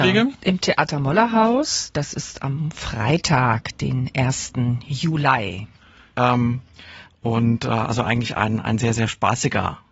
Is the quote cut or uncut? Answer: cut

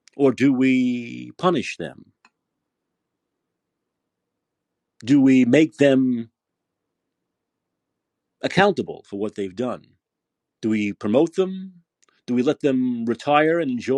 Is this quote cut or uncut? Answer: cut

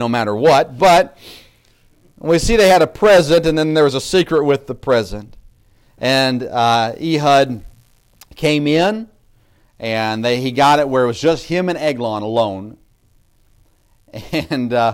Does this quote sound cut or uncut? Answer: uncut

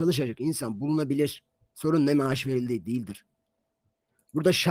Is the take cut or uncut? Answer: uncut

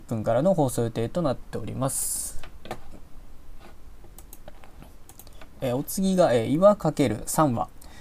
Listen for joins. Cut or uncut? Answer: uncut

